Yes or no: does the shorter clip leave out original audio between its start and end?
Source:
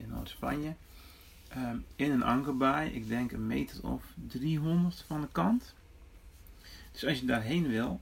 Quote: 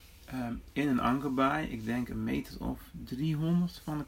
no